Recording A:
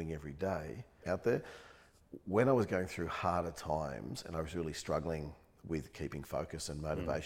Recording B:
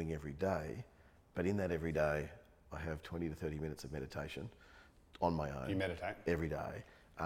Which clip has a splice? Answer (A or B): A